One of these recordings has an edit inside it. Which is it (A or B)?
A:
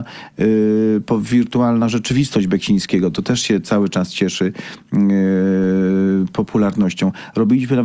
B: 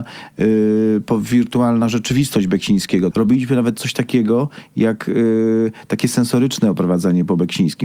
B